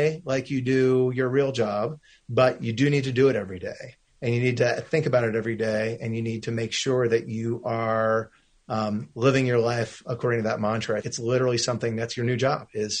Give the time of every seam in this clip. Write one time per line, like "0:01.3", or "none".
0:11.0